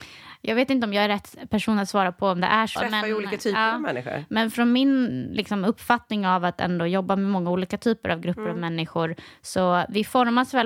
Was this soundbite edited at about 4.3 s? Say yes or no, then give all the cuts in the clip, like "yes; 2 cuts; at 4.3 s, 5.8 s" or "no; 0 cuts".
no; 1 cut; at 2.8 s